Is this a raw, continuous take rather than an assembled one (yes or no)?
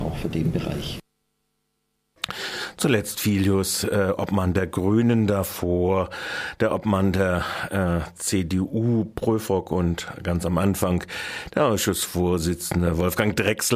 yes